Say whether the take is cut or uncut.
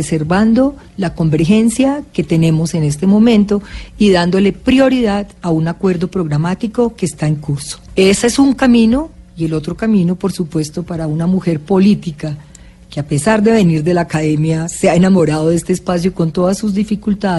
cut